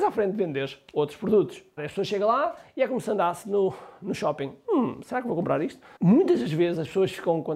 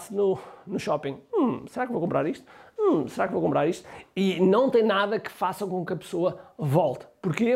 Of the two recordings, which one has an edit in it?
first; 2 cuts; at 1.8 s, 6.0 s

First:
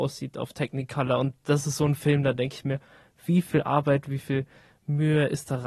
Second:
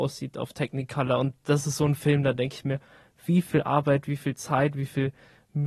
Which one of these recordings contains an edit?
first; 1 cut; at 4.1 s

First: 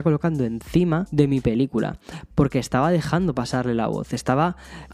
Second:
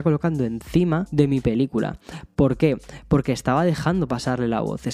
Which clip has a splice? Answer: first; 1 cut; at 2.3 s

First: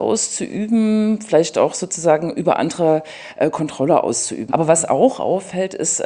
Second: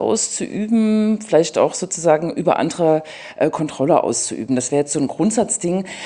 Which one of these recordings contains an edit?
first; 1 cut; at 4.5 s

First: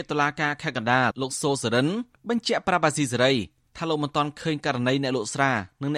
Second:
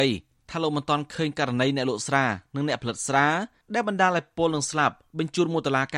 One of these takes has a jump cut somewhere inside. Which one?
first; 1 cut; at 1.1 s

